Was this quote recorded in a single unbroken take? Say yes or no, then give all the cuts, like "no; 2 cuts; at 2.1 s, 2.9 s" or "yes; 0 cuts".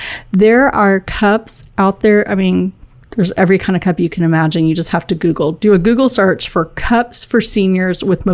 yes; 0 cuts